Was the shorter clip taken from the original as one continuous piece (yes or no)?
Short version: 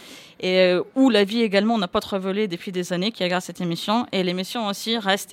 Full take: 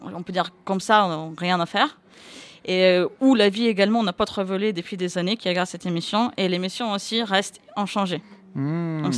yes